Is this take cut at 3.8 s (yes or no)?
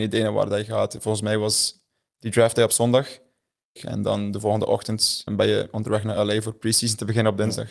yes